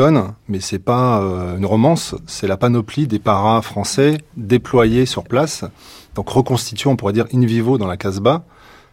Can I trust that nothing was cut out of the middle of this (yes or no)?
yes